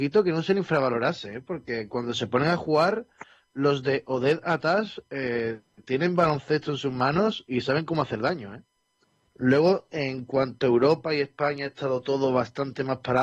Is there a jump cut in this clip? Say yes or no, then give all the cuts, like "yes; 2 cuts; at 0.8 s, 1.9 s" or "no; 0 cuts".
yes; 1 cut; at 9.3 s